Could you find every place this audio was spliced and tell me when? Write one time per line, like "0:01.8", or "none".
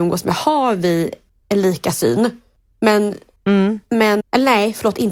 0:04.2